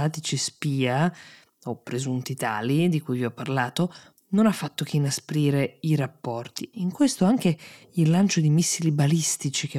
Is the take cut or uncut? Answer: cut